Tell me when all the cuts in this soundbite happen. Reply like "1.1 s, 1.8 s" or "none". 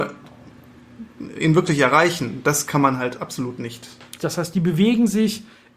4.2 s